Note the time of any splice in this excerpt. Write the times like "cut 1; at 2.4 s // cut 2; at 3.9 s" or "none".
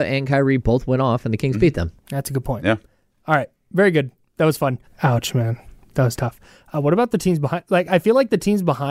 cut 1; at 4.9 s

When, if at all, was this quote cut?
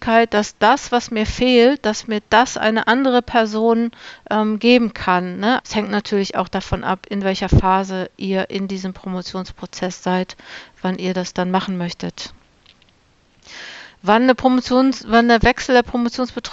cut 1; at 5.6 s

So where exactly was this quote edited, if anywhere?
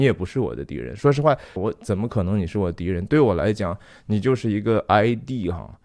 cut 1; at 1.6 s

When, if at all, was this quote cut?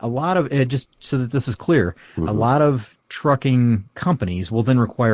none

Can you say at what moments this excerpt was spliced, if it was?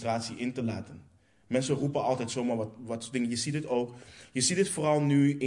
none

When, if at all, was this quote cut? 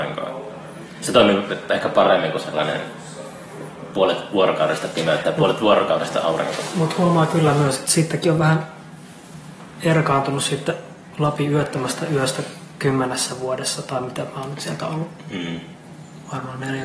none

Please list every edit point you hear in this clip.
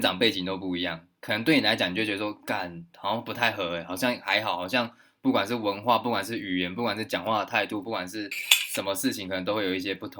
none

